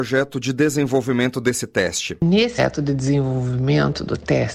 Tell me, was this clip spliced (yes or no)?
yes